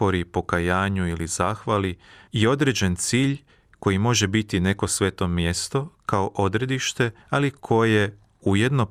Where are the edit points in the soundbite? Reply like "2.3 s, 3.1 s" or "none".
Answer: 2.3 s, 7.2 s